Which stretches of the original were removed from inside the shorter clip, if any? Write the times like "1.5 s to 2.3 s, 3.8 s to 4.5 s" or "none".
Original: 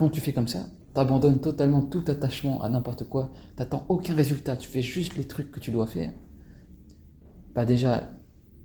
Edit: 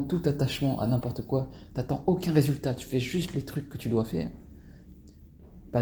none